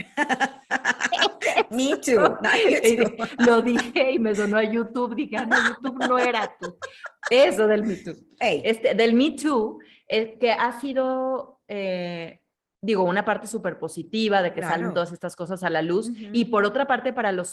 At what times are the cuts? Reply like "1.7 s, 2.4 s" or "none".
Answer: none